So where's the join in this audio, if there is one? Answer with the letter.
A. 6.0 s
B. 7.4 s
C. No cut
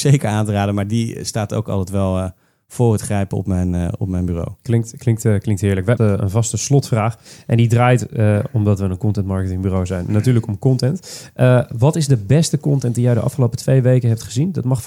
A